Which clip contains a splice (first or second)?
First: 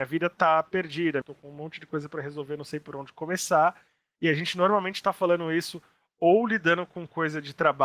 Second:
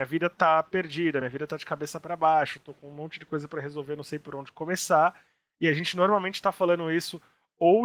first